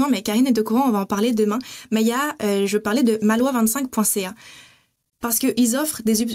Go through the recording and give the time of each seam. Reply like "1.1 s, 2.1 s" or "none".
none